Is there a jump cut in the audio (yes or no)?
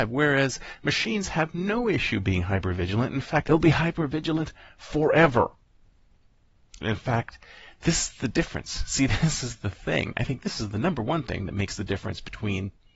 yes